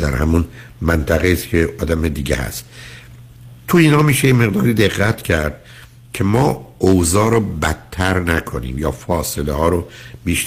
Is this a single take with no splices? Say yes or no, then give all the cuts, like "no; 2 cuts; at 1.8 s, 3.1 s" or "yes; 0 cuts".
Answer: yes; 0 cuts